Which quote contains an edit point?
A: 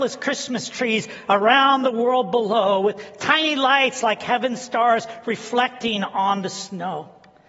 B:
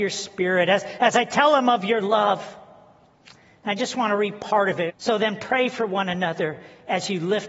B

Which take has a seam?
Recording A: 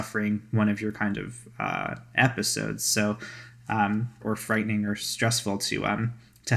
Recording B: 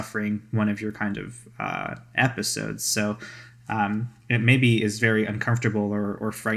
A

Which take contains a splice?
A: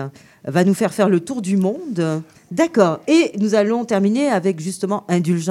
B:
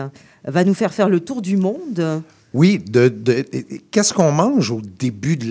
A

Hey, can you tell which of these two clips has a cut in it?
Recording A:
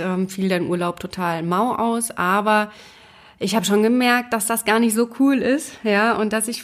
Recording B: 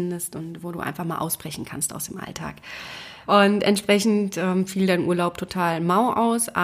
B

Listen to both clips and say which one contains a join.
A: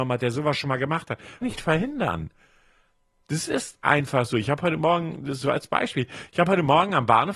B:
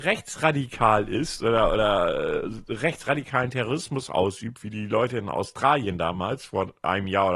A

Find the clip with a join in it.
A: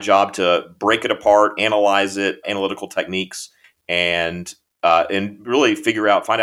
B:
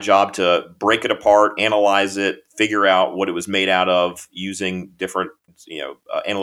A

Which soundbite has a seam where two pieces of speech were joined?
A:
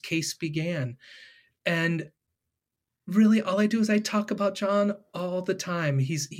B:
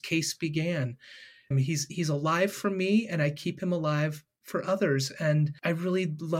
B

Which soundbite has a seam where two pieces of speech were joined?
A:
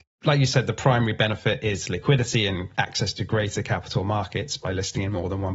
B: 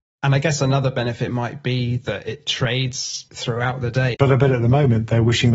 B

